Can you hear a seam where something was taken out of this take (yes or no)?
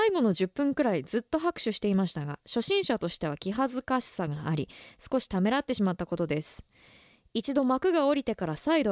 no